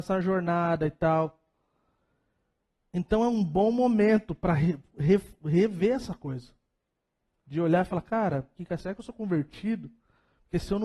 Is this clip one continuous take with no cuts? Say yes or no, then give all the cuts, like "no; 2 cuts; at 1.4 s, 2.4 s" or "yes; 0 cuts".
no; 1 cut; at 8.6 s